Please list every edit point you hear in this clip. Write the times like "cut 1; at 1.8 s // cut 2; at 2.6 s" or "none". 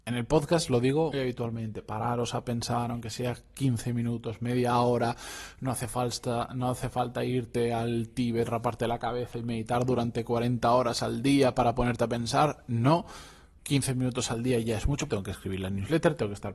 cut 1; at 1.1 s // cut 2; at 15.1 s

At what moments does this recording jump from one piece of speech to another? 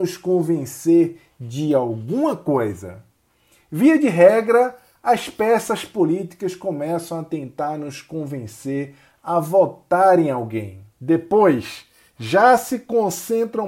cut 1; at 10.9 s

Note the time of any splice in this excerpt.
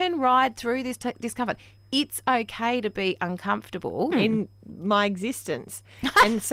cut 1; at 4.1 s

